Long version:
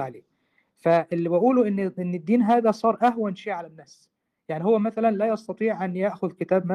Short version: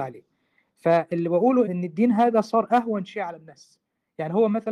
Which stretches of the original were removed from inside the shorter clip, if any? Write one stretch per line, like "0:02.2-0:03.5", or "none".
0:01.6-0:01.9